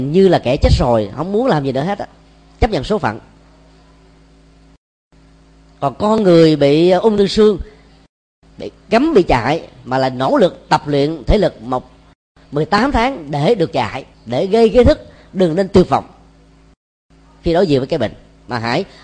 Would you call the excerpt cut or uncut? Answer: cut